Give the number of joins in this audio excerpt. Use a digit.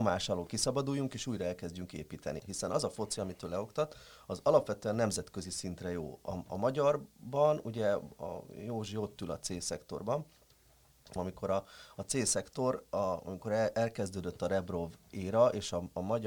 2